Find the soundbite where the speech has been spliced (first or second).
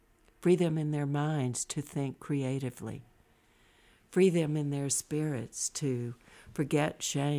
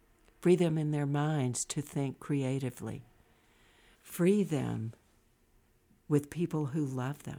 second